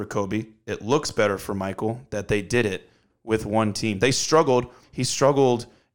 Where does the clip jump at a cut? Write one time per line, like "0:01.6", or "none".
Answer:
0:04.8